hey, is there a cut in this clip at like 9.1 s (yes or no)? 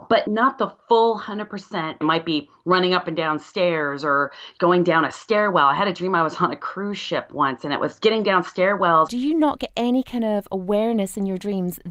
yes